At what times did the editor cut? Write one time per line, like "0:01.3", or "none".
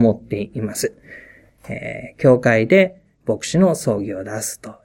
0:01.5

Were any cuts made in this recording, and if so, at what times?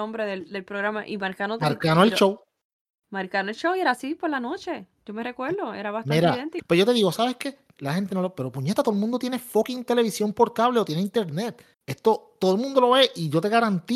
0:06.6
0:11.7

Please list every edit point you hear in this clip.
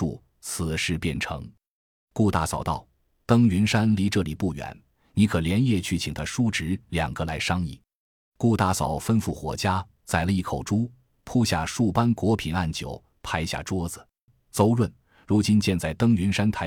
0:08.0
0:14.3

